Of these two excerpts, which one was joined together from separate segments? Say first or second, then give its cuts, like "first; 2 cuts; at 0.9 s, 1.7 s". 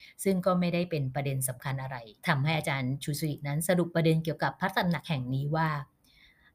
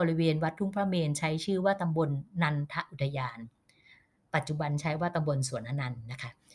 first; 1 cut; at 2.2 s